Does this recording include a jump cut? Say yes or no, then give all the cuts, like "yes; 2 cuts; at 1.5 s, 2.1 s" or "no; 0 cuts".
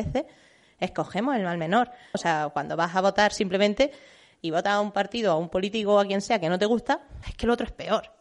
yes; 2 cuts; at 2.1 s, 7.2 s